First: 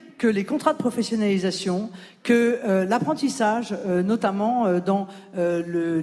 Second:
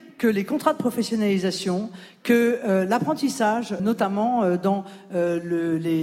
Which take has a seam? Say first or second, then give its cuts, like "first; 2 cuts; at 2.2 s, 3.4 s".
second; 1 cut; at 3.8 s